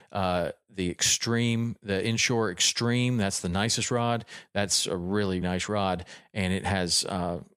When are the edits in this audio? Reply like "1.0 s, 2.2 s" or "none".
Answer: 5.4 s